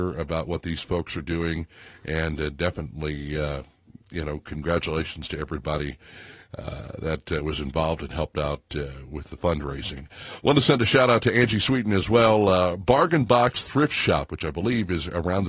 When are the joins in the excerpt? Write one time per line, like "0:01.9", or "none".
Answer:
none